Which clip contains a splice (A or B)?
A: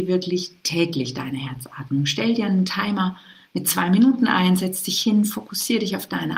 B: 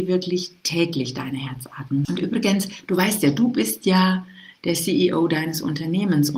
B